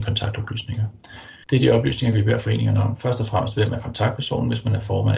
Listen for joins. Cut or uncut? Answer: cut